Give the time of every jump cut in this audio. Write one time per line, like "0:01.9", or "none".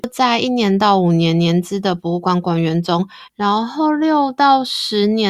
0:03.3